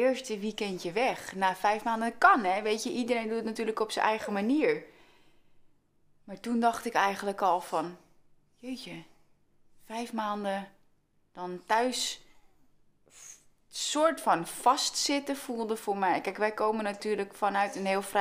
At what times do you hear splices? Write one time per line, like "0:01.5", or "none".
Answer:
none